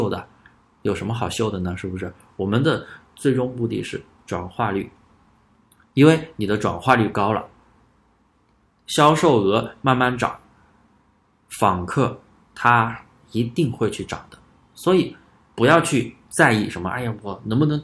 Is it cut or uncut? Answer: uncut